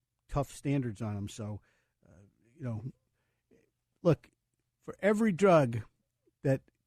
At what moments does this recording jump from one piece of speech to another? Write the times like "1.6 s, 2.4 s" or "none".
none